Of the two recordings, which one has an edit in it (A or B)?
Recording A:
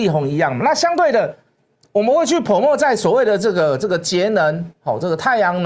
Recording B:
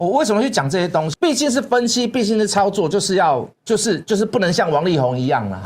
B